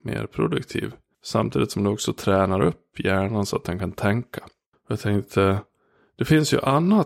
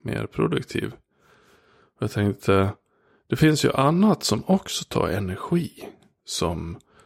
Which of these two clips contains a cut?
first; 2 cuts; at 1.1 s, 4.7 s

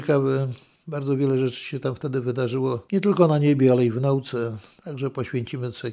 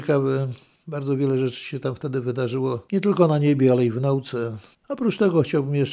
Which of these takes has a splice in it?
second; 1 cut; at 4.7 s

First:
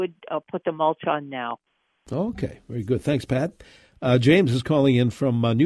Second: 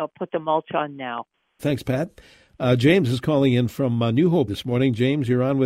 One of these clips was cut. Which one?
second; 2 cuts; at 1.6 s, 4.5 s

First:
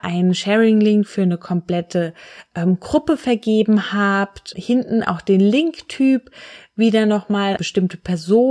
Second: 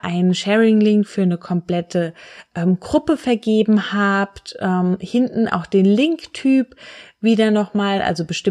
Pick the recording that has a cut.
first; 2 cuts; at 4.5 s, 7.6 s

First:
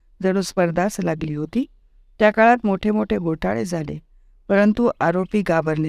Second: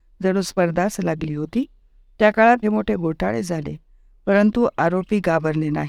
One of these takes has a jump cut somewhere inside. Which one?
second; 1 cut; at 2.6 s

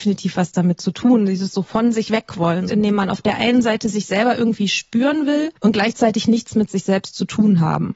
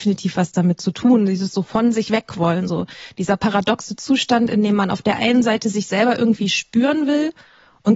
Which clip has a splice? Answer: first; 2 cuts; at 2.7 s, 5.6 s

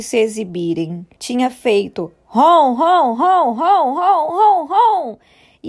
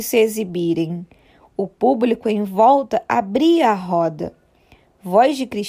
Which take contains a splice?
first; 1 cut; at 1.2 s

